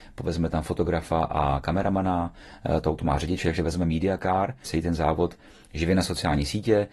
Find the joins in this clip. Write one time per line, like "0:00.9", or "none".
0:04.6